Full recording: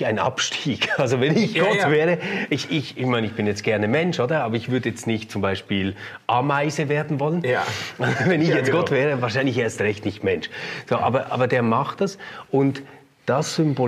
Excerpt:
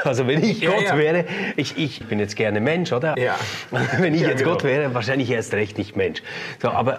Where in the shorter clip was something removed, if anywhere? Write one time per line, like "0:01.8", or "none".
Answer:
0:02.0
0:03.1